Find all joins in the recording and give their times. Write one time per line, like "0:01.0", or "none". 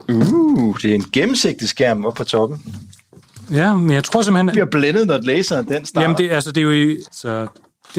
0:04.5
0:07.0